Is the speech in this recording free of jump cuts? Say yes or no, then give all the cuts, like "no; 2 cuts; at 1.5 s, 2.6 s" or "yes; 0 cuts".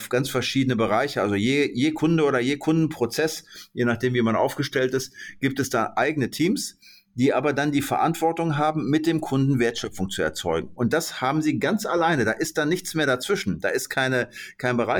yes; 0 cuts